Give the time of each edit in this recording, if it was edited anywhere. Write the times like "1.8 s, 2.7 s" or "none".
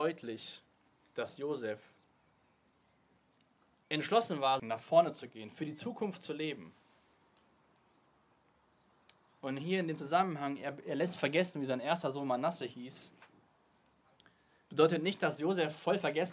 4.6 s